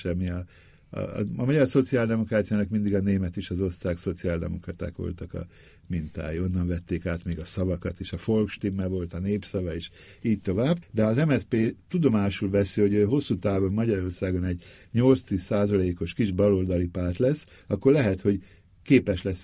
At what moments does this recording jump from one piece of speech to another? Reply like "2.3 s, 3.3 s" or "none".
10.8 s